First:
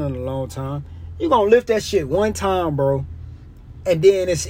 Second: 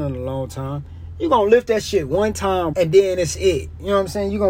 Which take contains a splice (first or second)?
second